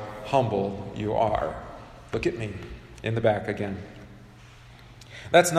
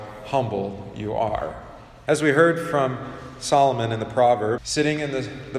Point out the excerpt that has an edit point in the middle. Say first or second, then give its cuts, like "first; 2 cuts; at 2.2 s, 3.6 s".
second; 2 cuts; at 2.1 s, 4.6 s